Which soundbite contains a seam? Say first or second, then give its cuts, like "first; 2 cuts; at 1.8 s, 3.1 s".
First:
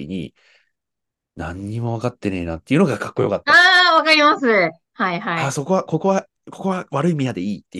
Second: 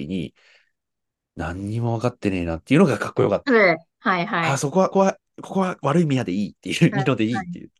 second; 2 cuts; at 3.5 s, 4.9 s